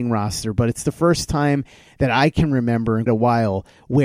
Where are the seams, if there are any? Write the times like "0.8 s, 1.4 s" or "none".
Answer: 3.1 s